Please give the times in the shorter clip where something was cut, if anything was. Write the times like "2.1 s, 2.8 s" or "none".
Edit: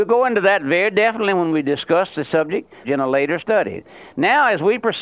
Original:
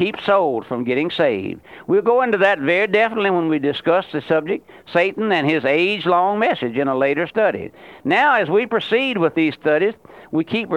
2.8 s